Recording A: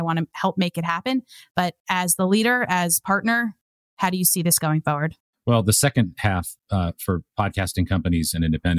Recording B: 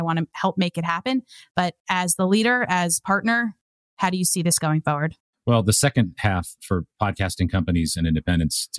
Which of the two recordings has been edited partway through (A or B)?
B